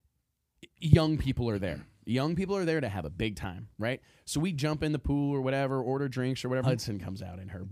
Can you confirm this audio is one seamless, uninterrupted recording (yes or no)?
no